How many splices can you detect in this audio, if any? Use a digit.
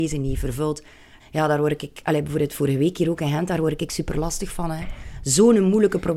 1